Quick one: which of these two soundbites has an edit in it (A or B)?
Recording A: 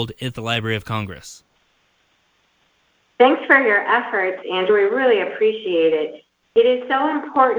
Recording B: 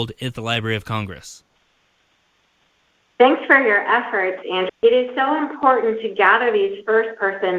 B